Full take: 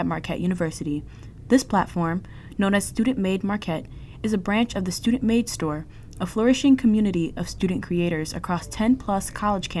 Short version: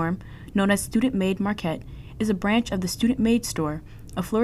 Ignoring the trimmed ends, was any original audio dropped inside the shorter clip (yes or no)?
no